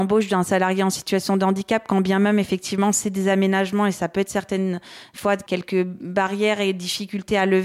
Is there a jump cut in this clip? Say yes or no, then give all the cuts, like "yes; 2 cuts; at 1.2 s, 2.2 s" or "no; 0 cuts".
no; 0 cuts